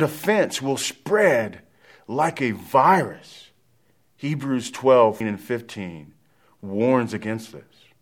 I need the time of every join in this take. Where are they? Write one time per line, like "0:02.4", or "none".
0:05.2